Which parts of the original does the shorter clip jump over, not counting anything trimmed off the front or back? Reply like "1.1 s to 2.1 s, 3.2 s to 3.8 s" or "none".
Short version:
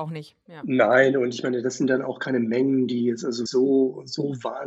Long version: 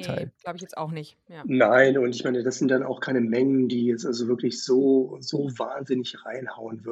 4.3 s to 4.6 s

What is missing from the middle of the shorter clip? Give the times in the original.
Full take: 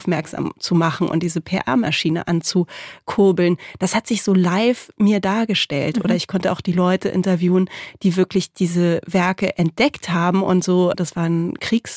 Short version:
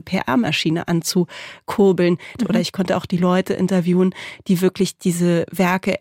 3.8 s to 5.9 s

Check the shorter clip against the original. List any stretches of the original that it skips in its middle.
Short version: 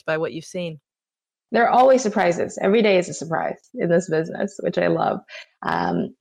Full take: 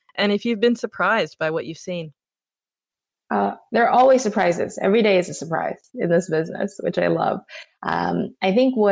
2.8 s to 3.7 s

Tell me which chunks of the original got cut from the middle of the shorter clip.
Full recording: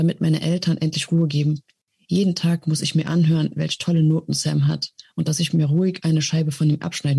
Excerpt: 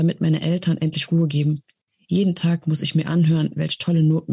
none

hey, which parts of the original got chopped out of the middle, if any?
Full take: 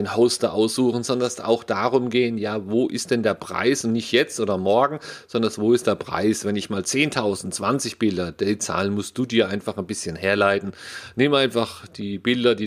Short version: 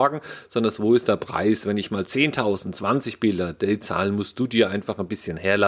none

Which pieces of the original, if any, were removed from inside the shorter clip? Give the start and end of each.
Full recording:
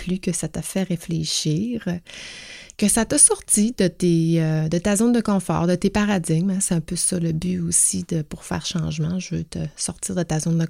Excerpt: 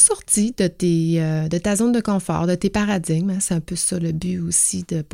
none

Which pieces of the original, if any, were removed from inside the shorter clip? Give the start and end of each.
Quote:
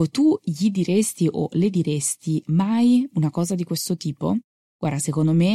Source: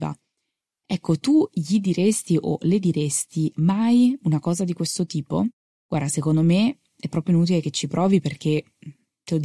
none

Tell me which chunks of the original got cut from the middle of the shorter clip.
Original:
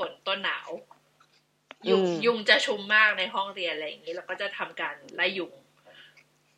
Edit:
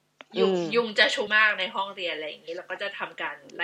2.8 s to 2.9 s

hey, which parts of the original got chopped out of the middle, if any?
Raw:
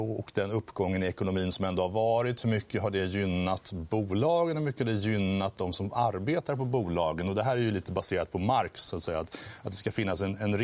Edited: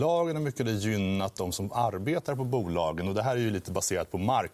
none

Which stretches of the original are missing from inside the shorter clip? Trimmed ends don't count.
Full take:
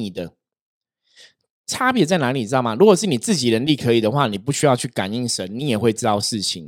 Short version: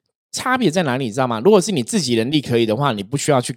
none

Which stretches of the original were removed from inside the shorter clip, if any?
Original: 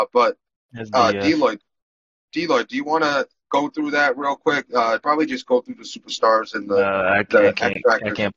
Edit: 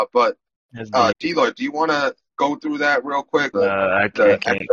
1.1 s to 2.3 s, 4.7 s to 6.7 s

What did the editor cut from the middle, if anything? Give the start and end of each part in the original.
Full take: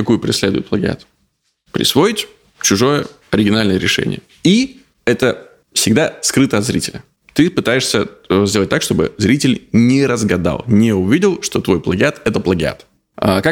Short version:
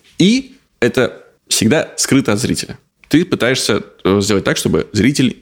none

